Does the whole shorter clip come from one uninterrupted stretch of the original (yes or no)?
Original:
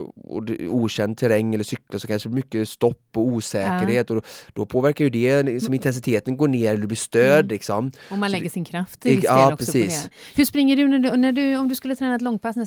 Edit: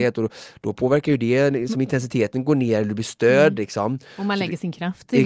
yes